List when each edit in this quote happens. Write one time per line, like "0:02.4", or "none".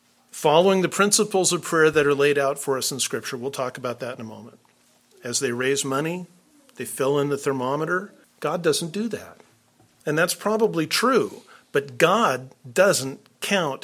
0:05.1
0:08.2
0:10.0